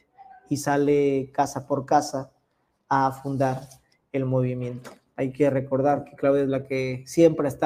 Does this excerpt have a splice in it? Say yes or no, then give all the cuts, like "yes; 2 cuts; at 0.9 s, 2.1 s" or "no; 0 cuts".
no; 0 cuts